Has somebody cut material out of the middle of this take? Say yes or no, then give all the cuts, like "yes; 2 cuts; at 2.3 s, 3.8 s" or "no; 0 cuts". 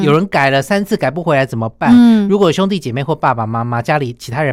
no; 0 cuts